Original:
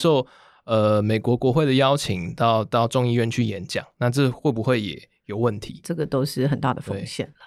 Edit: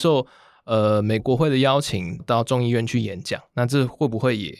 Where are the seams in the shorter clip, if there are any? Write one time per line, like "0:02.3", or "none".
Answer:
0:01.2
0:02.2